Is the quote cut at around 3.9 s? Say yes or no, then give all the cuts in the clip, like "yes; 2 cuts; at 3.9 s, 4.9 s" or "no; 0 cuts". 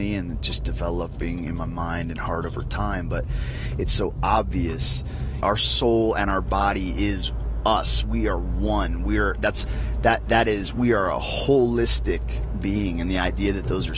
no; 1 cut; at 5.4 s